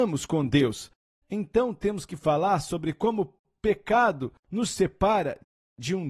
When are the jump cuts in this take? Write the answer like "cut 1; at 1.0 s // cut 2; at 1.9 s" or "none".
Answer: cut 1; at 1.2 s // cut 2; at 4.4 s

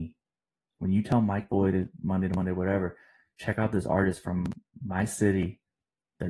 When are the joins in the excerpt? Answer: none

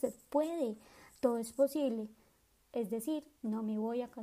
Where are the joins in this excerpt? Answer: cut 1; at 2.6 s

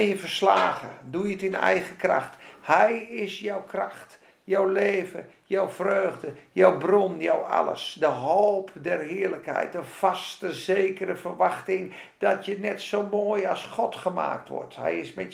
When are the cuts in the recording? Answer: none

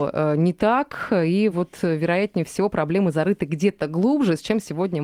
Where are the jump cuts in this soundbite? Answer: none

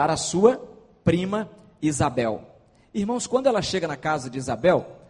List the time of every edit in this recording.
none

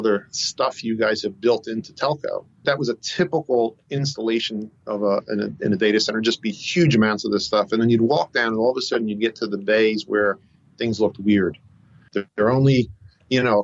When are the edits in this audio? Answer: cut 1; at 2.6 s

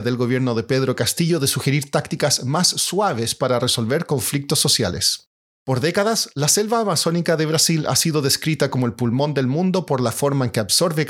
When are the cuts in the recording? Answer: none

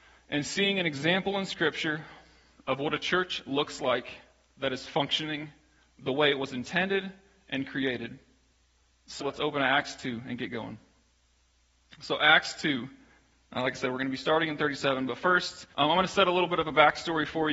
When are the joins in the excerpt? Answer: cut 1; at 9.2 s // cut 2; at 15.7 s

